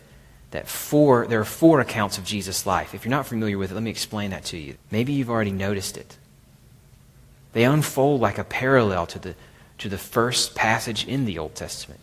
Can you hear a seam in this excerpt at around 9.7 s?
no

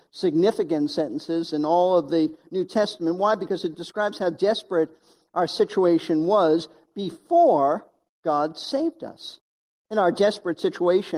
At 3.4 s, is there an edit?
no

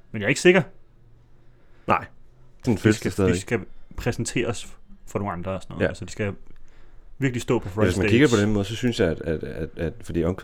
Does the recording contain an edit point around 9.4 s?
no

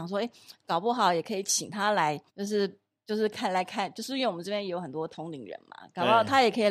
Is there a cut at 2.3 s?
yes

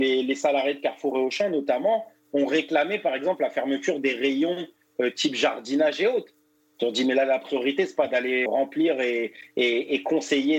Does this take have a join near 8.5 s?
yes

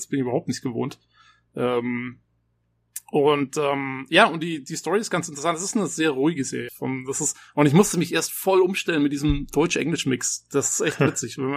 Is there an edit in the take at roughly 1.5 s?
no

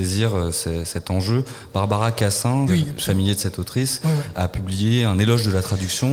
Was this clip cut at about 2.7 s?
yes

